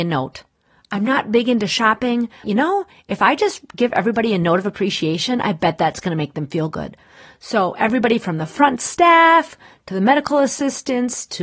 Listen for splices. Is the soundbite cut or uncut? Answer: cut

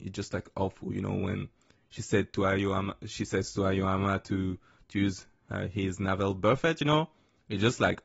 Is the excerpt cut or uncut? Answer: uncut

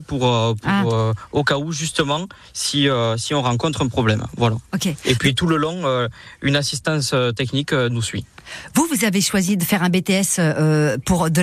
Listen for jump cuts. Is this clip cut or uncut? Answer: uncut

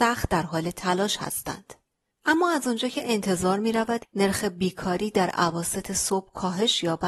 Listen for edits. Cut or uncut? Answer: cut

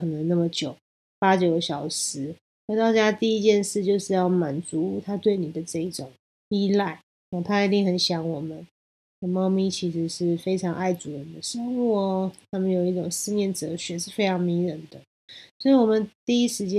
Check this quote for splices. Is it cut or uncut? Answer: uncut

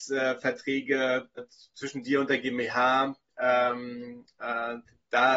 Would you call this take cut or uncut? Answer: cut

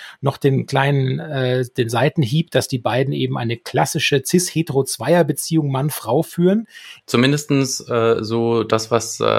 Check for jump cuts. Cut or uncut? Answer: cut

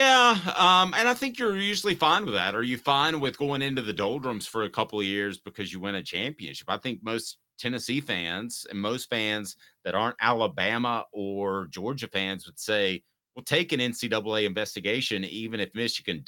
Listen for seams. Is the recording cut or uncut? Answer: uncut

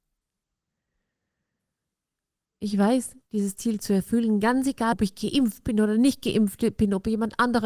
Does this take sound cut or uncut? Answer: cut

